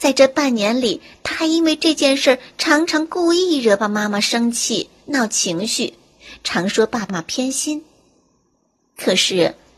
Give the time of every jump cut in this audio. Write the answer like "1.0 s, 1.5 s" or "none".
3.8 s, 7.1 s